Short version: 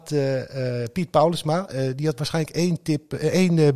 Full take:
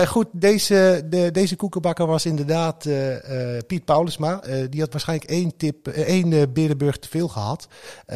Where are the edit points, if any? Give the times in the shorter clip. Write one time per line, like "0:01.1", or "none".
none